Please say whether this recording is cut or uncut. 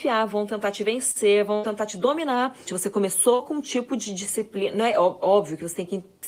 cut